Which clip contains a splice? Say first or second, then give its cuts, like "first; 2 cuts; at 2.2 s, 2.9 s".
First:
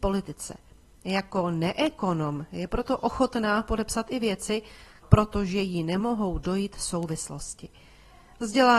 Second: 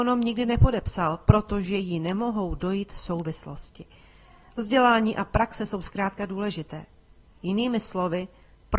first; 1 cut; at 5.0 s